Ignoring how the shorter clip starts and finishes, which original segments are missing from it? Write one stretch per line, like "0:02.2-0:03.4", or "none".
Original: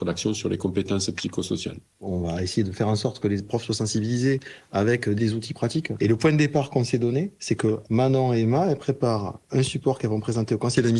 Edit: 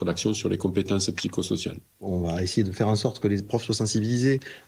none